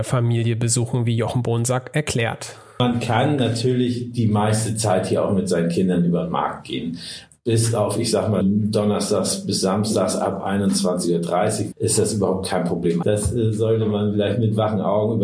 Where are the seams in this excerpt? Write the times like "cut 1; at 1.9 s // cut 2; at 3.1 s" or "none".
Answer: cut 1; at 8.4 s // cut 2; at 11.7 s // cut 3; at 13.0 s